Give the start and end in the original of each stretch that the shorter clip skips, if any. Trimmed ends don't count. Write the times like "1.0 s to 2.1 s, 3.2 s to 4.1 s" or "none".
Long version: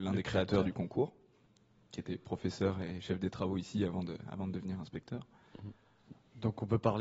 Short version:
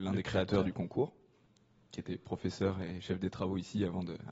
none